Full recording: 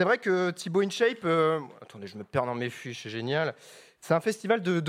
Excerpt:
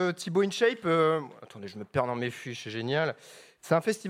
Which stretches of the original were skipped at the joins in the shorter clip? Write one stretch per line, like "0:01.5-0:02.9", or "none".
none